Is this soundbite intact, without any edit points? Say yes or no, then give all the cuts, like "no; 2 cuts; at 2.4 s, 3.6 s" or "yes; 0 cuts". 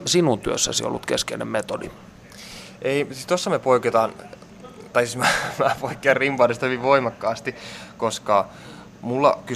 yes; 0 cuts